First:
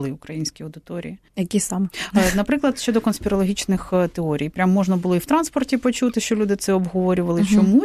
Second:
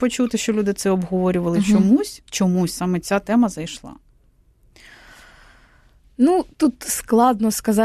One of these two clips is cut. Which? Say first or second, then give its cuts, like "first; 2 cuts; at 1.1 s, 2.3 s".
first; 1 cut; at 1.3 s